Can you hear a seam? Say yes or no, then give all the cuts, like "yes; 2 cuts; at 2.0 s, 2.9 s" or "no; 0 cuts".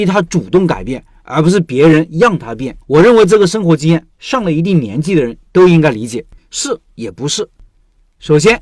yes; 2 cuts; at 2.8 s, 6.4 s